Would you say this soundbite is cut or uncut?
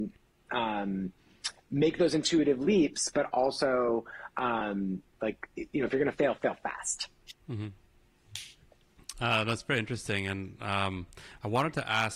uncut